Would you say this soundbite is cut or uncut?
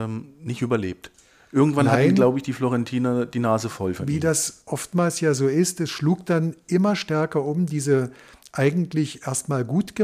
uncut